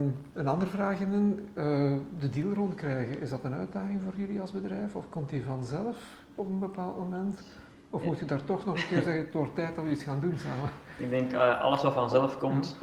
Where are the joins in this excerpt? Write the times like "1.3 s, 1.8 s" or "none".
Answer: none